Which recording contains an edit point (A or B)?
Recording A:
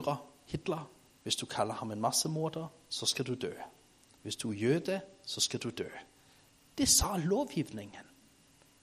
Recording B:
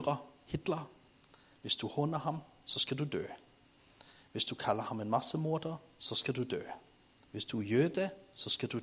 A